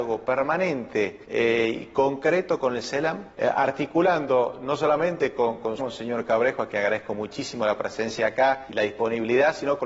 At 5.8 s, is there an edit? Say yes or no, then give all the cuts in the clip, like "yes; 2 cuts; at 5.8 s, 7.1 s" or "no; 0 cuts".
yes; 1 cut; at 5.8 s